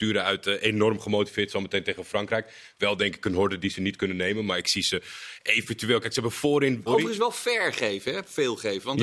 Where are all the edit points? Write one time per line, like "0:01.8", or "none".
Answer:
0:06.9